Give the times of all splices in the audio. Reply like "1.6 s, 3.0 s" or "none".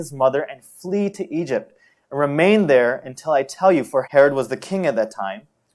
4.0 s